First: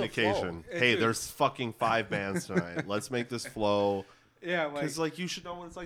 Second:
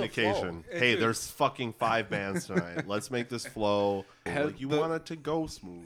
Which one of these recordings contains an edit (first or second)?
second